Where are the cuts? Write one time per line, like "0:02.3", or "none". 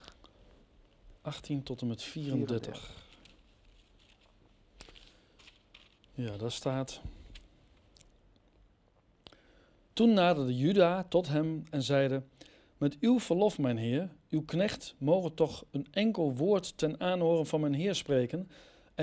none